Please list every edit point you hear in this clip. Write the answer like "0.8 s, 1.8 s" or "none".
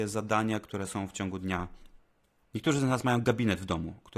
2.4 s